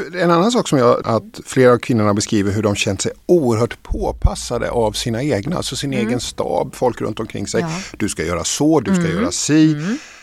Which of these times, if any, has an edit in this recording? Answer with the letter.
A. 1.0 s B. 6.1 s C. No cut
A